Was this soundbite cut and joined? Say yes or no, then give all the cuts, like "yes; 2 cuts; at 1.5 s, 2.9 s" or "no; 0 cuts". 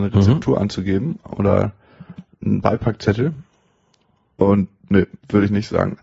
no; 0 cuts